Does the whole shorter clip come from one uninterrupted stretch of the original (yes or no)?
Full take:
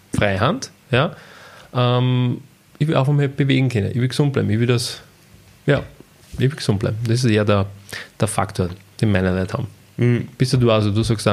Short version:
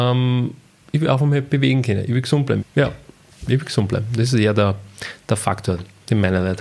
no